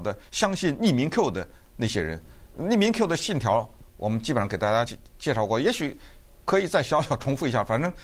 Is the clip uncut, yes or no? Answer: yes